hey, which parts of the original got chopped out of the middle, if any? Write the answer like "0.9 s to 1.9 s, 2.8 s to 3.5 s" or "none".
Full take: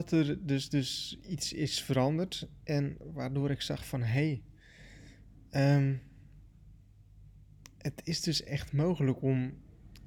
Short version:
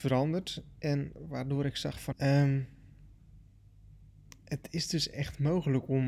4.0 s to 5.5 s

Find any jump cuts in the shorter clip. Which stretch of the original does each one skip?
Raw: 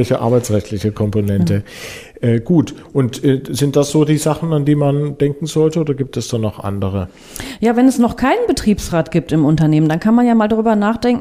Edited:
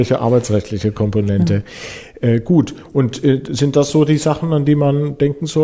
none

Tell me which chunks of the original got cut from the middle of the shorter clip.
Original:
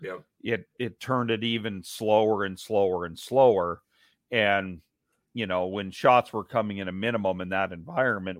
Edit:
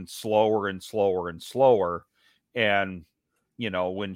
none

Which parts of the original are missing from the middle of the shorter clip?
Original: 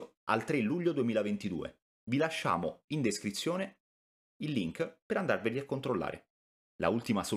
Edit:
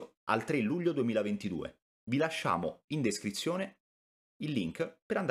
none

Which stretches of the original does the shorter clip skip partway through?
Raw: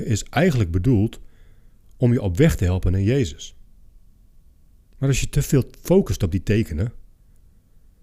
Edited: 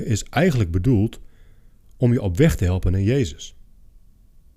none

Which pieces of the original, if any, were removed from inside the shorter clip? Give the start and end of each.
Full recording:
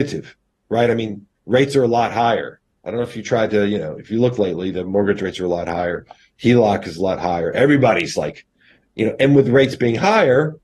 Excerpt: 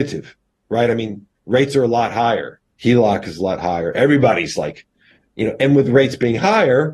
2.8 s to 6.4 s

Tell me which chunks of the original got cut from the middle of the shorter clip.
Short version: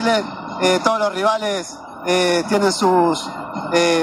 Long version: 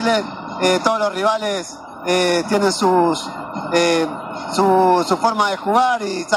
none

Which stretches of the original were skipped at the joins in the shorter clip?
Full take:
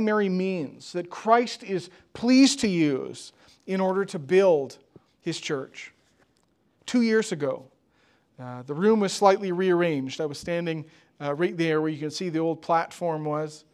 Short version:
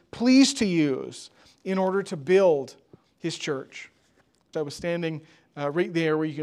6.6 s to 10.2 s

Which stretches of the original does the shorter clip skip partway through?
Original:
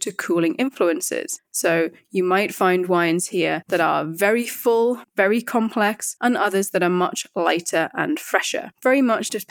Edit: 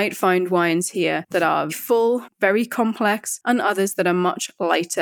4.1 s to 4.4 s

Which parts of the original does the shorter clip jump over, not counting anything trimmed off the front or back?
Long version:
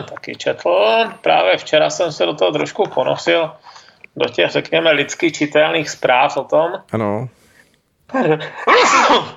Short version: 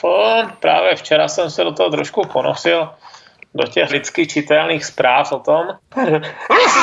4.5 s to 4.9 s, 6.8 s to 7.9 s

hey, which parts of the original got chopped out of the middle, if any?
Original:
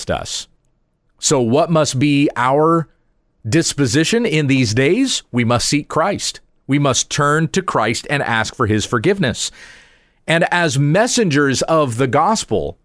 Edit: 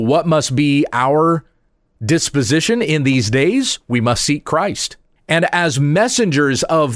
6.6 s to 10.1 s

